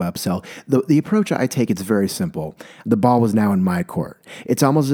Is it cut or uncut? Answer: cut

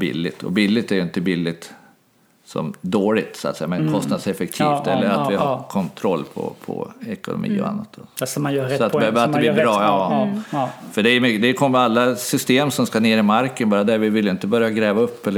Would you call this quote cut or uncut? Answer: uncut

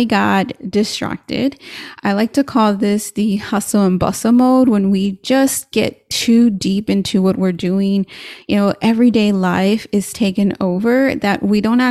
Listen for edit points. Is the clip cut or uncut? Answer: uncut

